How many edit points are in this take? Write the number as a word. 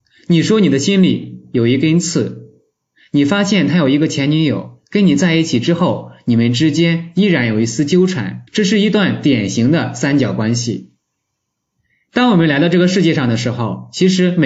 one